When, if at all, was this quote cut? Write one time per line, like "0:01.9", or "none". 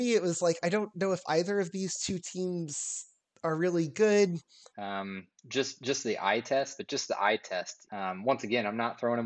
0:04.7
0:06.8
0:07.9